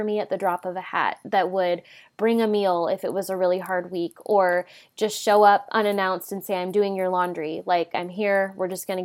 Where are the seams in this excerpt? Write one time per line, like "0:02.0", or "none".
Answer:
0:07.9

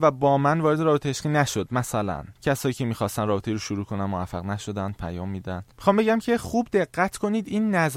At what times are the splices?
0:02.4
0:05.7

